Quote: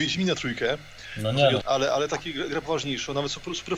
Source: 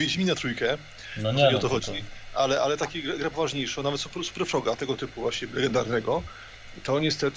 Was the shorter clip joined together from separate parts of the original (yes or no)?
yes